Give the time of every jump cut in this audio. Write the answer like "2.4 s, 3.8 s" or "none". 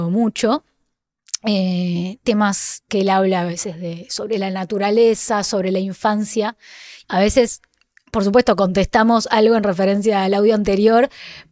7.0 s